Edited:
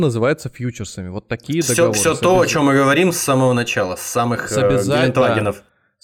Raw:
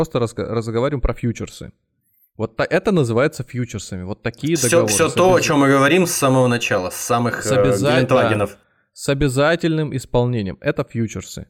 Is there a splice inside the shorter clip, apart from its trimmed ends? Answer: no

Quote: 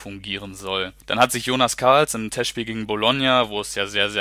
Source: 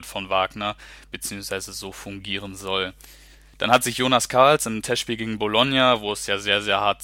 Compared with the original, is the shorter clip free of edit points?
no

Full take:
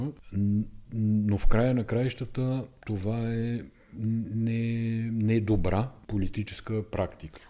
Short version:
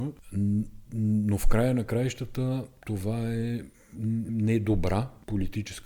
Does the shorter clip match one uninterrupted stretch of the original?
no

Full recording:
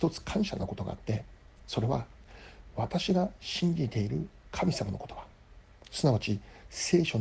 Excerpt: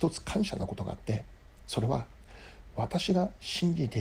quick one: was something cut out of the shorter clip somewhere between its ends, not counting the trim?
no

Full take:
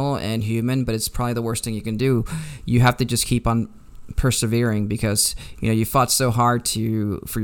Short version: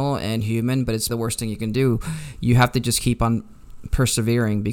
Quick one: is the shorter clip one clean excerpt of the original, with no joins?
no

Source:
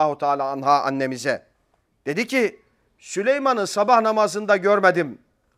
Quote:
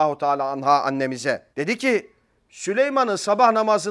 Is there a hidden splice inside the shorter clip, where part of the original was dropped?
yes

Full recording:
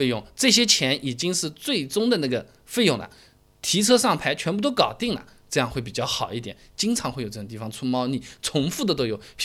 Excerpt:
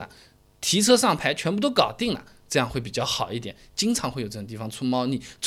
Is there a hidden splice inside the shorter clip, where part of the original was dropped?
no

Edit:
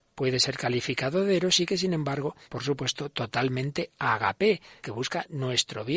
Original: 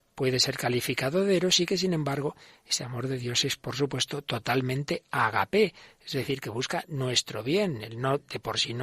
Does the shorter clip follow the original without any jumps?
no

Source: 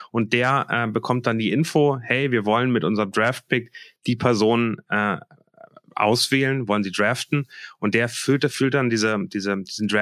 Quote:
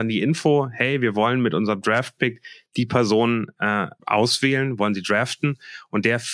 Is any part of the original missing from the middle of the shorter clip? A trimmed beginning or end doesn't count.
yes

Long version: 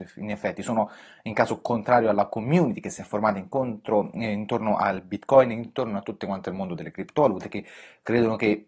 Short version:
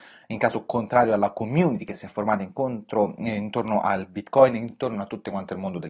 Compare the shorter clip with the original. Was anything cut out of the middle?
no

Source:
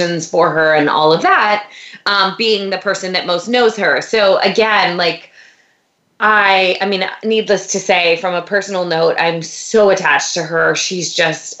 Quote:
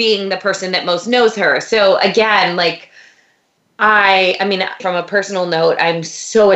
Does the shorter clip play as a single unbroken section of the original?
no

